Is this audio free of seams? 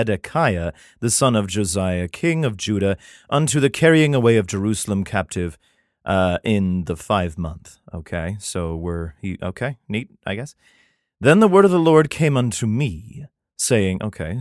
yes; 0 cuts

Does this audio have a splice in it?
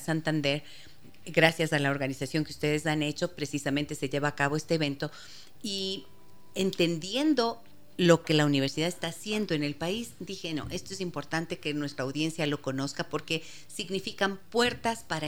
no; 0 cuts

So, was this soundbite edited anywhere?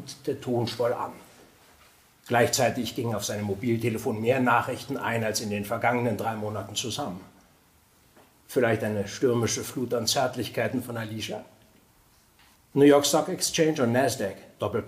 yes; 1 cut; at 12.5 s

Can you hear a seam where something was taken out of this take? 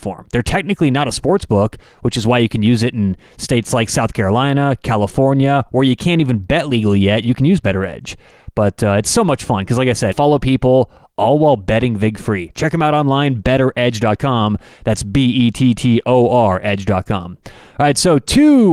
yes; 1 cut; at 10.1 s

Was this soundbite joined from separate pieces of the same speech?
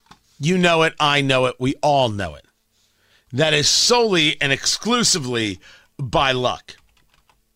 no; 0 cuts

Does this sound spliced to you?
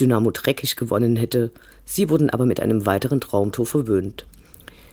no; 0 cuts

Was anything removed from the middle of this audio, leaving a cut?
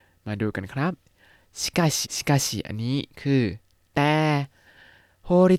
yes; 1 cut; at 2.0 s

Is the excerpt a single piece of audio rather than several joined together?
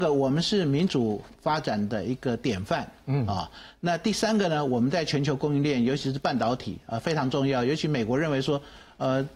yes; 0 cuts

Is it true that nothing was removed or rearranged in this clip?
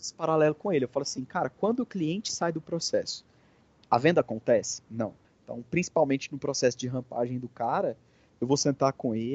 no; 1 cut; at 5.2 s

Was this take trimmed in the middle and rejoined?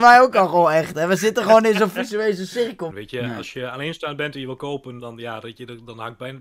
yes; 2 cuts; at 2.9 s, 5.0 s

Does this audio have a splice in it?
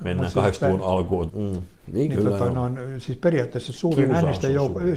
yes; 1 cut; at 1.3 s

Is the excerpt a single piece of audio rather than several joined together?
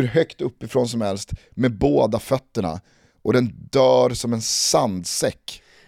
yes; 0 cuts

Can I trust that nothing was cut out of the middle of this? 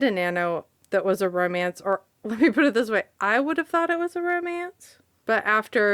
yes; 0 cuts

